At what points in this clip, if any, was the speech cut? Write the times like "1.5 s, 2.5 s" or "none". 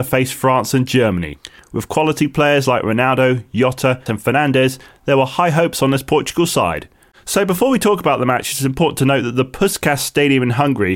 4.1 s, 7.1 s